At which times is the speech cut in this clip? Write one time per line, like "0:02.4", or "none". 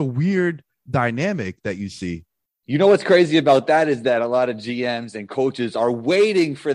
none